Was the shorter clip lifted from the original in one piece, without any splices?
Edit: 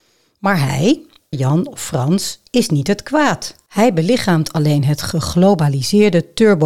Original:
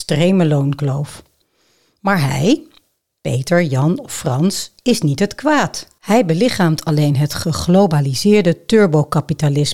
no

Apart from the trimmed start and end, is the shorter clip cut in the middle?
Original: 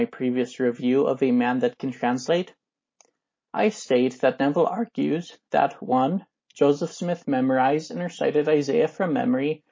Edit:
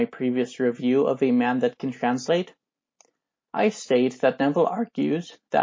no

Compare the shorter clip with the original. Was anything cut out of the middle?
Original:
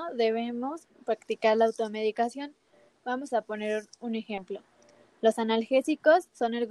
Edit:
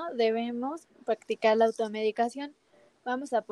no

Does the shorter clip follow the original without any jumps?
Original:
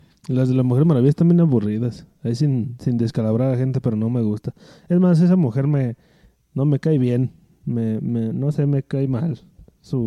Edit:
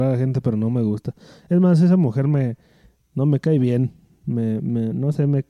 yes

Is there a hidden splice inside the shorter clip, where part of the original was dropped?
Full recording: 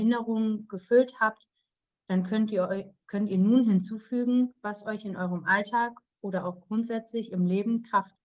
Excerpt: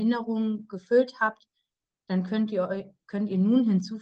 no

